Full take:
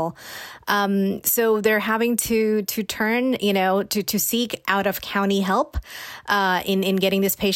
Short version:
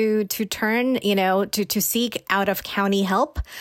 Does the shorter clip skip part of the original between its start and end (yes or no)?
no